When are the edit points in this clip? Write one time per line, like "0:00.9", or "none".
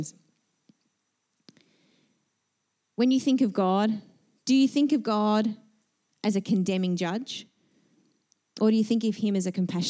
none